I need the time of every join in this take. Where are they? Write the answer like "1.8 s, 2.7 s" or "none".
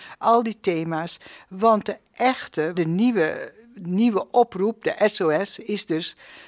2.7 s